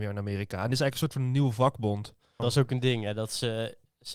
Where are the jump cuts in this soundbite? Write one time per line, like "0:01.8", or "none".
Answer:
0:02.4